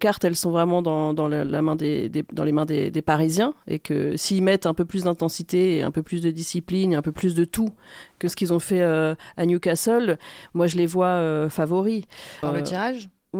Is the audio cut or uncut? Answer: cut